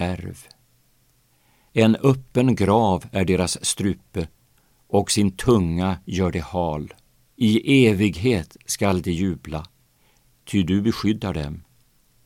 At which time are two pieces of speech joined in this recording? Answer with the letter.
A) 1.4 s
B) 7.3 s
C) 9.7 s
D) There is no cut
B